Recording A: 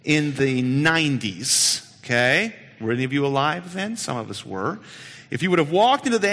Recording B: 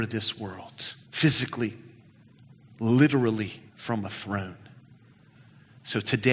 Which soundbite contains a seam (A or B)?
B